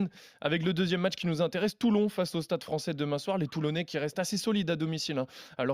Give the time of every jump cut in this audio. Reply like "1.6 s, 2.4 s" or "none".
none